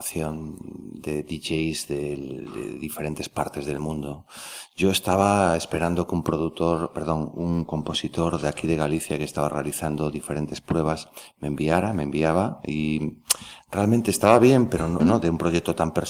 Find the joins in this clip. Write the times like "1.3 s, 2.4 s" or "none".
15.0 s